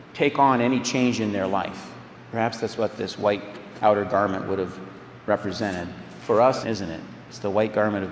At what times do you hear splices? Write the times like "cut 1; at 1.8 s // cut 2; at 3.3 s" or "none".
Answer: cut 1; at 6.6 s